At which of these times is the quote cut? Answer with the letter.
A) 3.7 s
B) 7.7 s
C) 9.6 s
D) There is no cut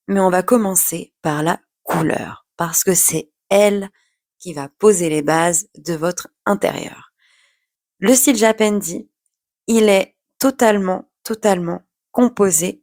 D